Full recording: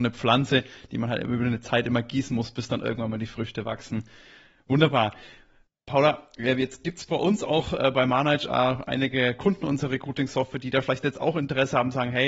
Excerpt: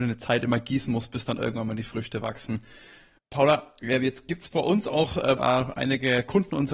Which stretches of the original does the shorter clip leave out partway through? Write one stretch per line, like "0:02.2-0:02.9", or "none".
0:04.6-0:05.7
0:07.9-0:08.5